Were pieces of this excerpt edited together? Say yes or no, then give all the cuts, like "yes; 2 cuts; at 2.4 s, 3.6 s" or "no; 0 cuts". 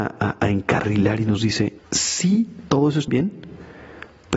yes; 2 cuts; at 1.8 s, 3.1 s